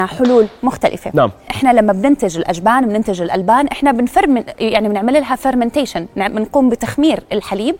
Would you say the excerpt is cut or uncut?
cut